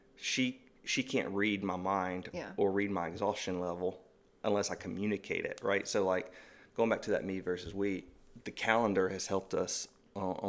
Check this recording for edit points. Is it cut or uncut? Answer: uncut